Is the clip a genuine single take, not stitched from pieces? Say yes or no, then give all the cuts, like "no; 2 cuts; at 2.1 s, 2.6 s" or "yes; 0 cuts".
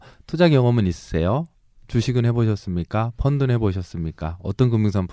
yes; 0 cuts